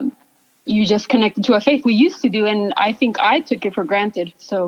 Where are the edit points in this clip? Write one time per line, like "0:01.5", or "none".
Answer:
0:01.8